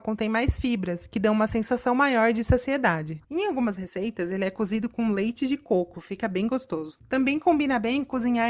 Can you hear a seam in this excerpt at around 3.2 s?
yes; 1 cut; at 3.2 s

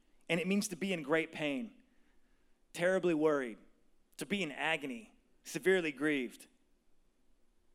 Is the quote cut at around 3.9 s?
no; 0 cuts

